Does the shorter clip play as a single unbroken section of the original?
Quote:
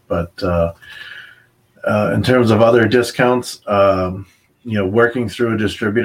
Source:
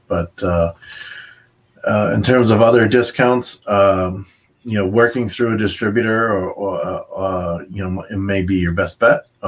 yes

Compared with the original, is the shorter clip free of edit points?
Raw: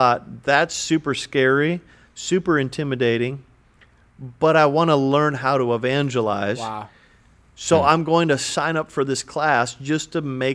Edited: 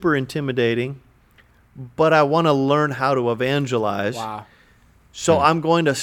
yes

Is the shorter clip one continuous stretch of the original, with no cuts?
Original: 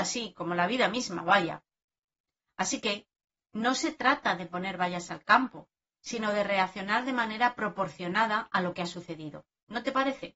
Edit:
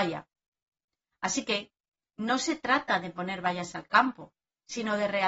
yes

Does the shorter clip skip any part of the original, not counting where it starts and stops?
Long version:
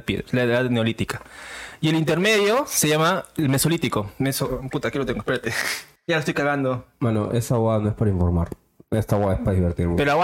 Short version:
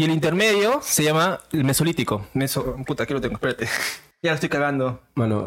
no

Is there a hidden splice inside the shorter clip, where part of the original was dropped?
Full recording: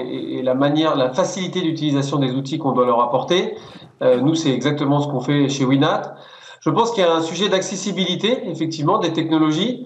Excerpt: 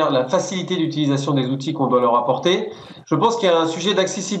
yes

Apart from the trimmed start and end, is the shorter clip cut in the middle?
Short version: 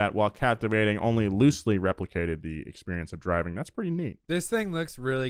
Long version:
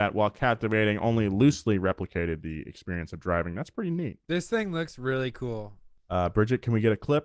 no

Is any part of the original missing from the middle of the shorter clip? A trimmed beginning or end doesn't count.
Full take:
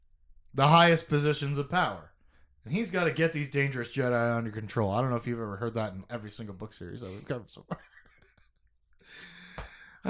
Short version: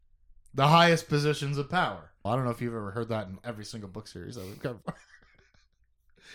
yes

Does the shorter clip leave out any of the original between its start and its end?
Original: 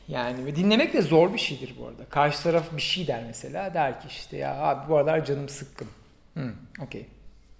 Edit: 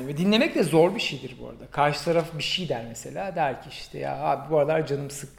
no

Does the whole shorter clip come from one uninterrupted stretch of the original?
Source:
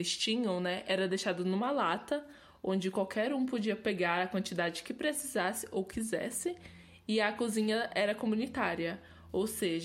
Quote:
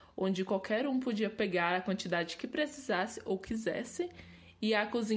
yes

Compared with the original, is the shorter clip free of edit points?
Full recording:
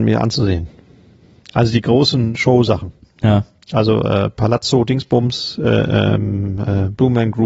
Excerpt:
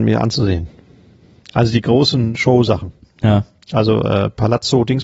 yes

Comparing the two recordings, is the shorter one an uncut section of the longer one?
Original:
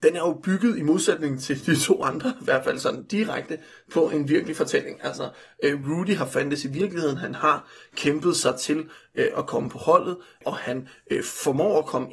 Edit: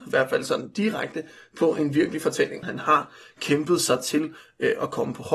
no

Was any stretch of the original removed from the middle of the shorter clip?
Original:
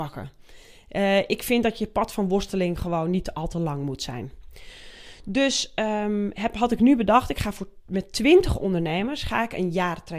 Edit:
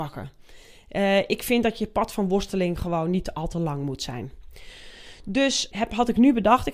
yes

